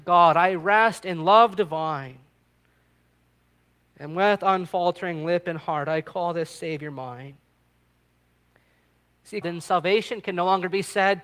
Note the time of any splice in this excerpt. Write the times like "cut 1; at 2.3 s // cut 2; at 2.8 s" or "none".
cut 1; at 9.4 s